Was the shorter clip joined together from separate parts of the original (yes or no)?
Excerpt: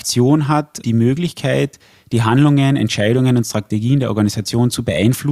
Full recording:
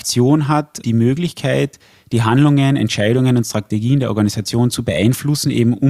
no